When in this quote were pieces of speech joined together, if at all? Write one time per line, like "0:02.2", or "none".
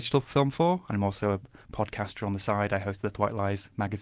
none